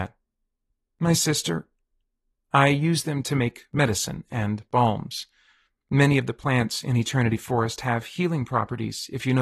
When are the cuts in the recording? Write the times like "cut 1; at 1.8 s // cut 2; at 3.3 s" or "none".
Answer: cut 1; at 2.3 s